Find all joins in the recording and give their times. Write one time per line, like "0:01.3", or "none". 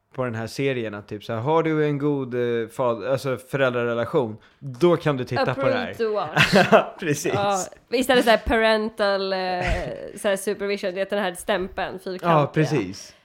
none

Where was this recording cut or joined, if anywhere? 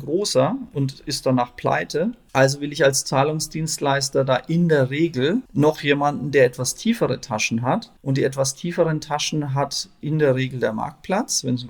none

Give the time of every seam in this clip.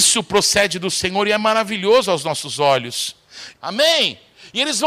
0:03.5

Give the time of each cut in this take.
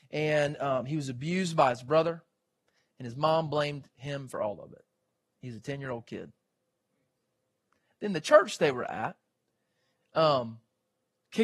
0:02.9

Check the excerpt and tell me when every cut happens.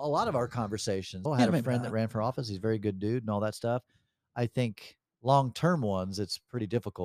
0:01.3

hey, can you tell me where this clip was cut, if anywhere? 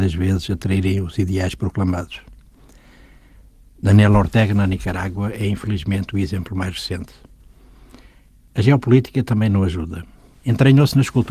0:10.3

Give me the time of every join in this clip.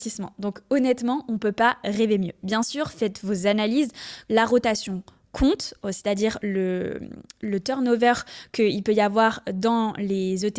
0:04.3

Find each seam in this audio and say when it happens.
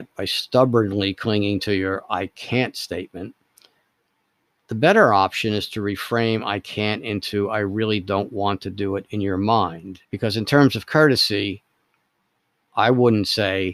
0:10.0

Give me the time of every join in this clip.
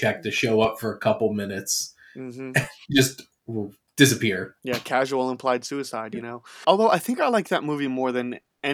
0:06.6

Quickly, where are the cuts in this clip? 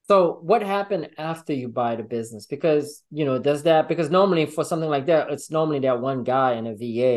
none

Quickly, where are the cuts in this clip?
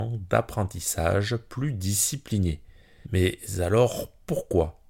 0:03.0

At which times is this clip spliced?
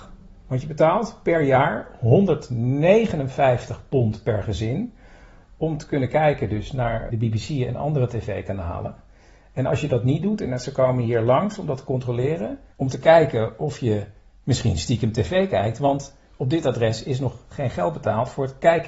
0:07.1
0:12.7

